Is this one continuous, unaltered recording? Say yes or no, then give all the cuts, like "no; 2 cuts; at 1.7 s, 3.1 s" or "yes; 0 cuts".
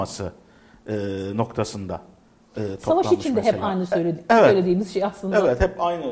yes; 0 cuts